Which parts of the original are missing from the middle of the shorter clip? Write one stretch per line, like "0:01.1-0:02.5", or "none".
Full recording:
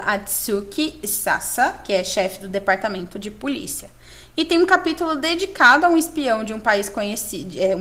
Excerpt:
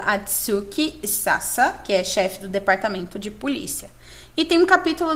none